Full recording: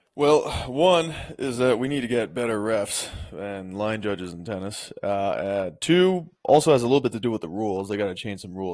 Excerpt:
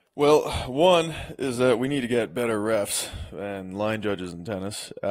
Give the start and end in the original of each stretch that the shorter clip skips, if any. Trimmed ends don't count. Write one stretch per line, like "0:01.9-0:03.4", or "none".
none